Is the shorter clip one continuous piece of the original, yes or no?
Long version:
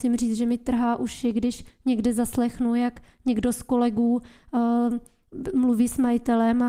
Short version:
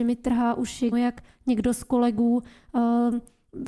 no